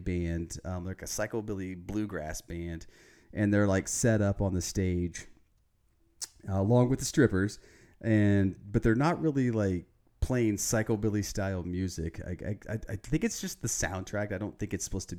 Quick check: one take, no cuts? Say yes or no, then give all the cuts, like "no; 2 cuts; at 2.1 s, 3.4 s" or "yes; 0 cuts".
yes; 0 cuts